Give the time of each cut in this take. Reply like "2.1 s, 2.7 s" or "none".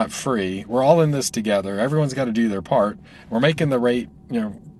none